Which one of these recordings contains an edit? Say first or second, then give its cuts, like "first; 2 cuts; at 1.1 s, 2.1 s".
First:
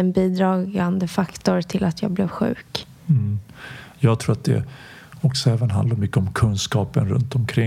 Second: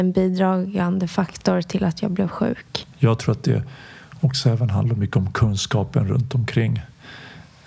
second; 1 cut; at 2.9 s